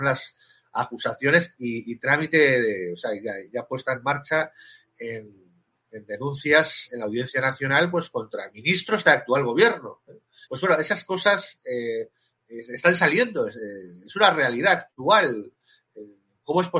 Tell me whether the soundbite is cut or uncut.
cut